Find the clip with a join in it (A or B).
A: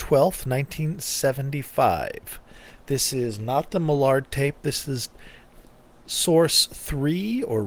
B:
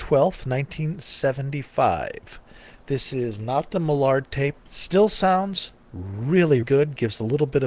B